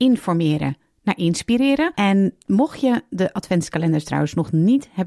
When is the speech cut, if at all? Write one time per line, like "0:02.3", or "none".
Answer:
0:01.9